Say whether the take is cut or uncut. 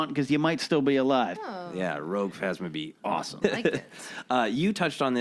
cut